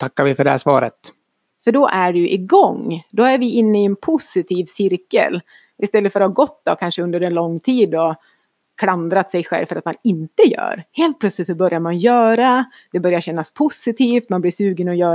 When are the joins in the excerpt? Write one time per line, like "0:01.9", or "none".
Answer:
0:01.4